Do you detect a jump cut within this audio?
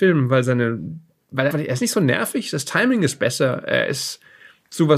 yes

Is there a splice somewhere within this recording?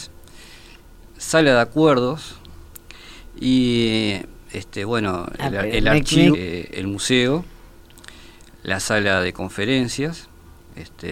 yes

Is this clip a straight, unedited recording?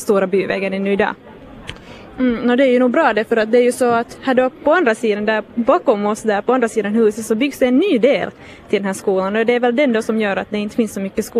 no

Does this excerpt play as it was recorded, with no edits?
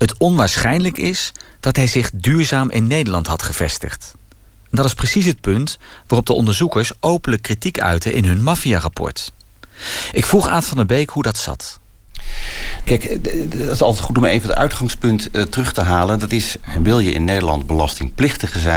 yes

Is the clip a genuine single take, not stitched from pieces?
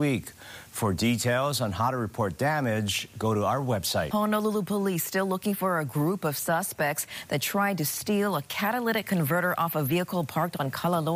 yes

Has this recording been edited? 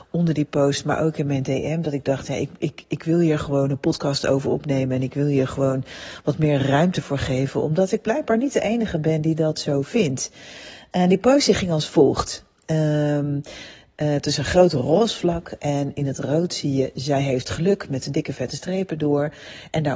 no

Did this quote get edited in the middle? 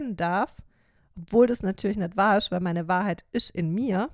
no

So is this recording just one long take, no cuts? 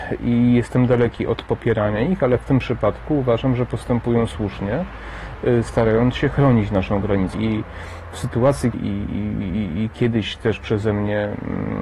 no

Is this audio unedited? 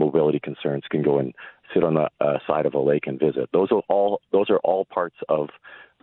yes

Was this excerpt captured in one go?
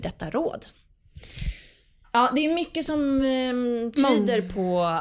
yes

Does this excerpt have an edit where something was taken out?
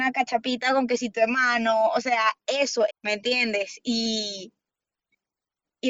yes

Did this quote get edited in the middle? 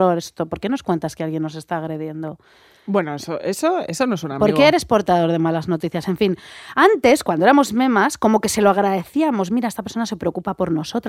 no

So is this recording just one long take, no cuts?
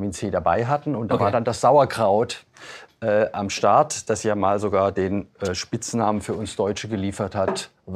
yes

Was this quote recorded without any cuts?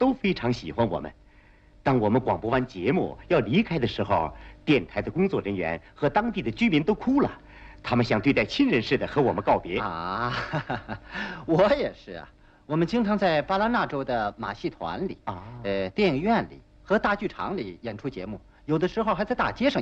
yes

